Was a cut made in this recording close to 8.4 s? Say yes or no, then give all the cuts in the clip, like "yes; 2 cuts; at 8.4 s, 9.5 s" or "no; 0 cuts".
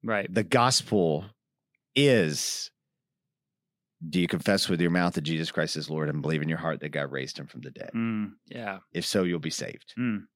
yes; 1 cut; at 8.4 s